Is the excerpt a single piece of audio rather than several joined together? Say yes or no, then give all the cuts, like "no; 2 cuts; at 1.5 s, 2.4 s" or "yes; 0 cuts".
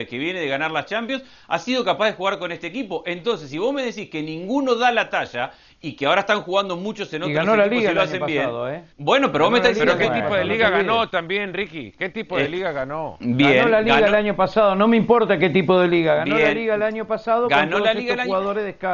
no; 1 cut; at 8.9 s